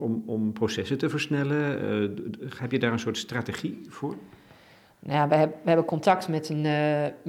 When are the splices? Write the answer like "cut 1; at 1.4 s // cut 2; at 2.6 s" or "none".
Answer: none